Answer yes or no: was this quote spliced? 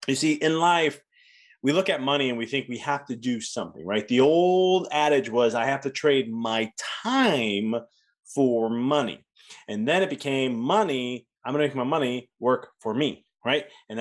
no